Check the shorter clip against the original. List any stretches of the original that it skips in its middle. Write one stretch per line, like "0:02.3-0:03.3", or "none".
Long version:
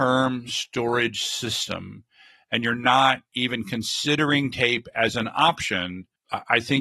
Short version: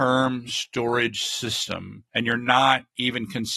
0:02.1-0:02.4